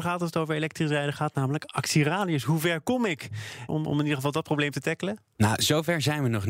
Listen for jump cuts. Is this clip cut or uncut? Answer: cut